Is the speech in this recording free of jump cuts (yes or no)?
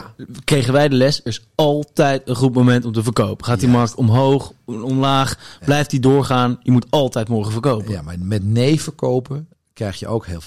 no